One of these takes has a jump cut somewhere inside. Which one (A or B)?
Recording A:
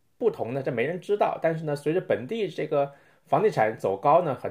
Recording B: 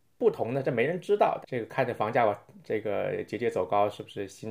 B